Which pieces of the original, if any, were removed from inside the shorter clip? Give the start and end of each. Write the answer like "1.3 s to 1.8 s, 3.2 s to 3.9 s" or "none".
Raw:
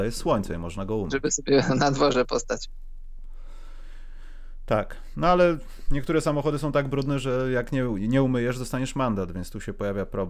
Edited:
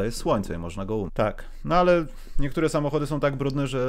1.1 s to 4.6 s